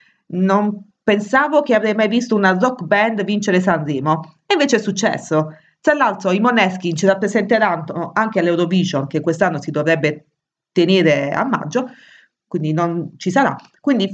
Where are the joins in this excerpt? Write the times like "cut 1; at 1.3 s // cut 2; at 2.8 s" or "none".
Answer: cut 1; at 13.1 s